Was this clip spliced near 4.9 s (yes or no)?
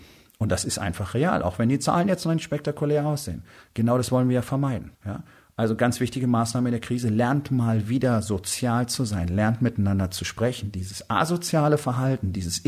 yes